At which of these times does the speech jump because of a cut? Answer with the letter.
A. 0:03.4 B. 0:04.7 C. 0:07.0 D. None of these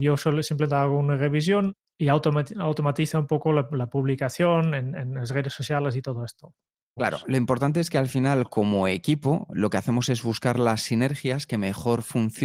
C